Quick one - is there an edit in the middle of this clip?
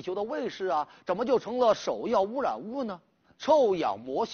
yes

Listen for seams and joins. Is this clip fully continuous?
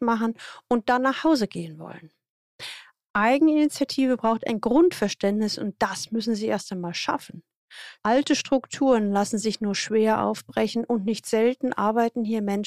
no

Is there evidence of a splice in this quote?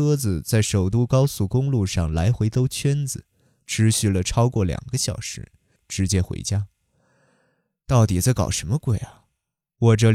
yes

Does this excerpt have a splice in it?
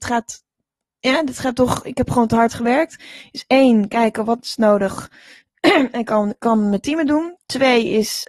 no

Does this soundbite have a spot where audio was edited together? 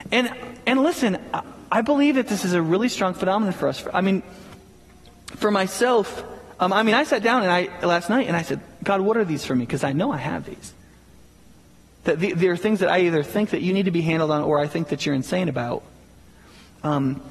no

